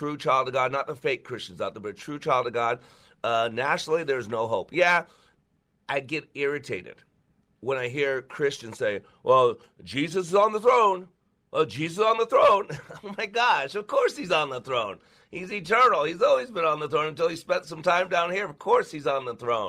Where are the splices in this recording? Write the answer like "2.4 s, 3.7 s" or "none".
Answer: none